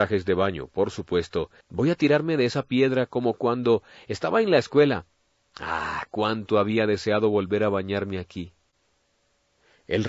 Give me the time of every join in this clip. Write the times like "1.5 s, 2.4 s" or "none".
1.6 s

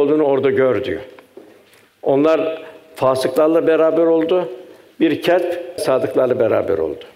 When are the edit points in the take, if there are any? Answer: 5.8 s

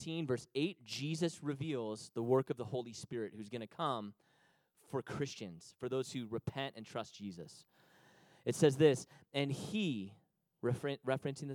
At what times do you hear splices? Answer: none

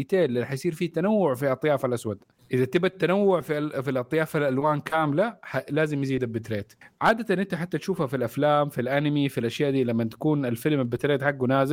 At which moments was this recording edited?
none

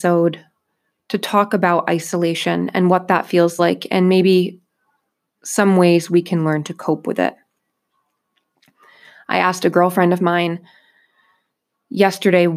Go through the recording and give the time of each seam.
none

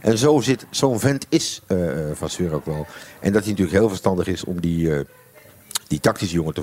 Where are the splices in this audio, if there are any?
none

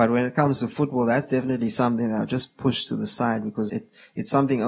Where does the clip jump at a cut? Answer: 3.7 s

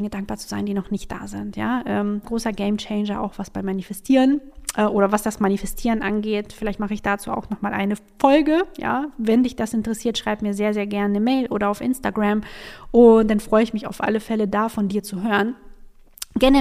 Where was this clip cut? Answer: 2.2 s

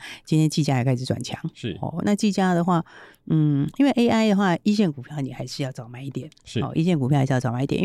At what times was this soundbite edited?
none

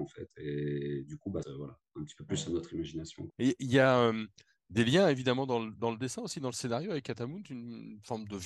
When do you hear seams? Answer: 1.4 s, 3.3 s

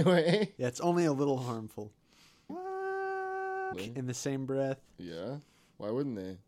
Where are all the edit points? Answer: 2.5 s, 3.7 s

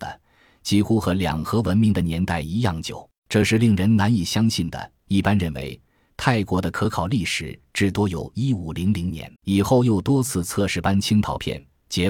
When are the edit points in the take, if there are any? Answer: 3.2 s, 9.4 s

